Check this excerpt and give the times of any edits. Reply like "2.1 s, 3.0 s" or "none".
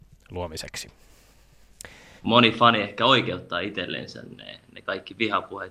2.2 s